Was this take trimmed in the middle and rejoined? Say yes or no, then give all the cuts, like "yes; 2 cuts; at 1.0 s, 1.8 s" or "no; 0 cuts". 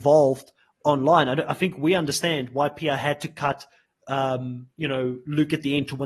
no; 0 cuts